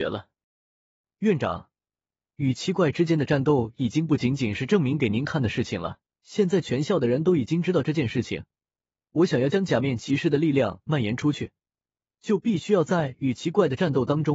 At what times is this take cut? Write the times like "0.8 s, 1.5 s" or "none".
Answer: 6.1 s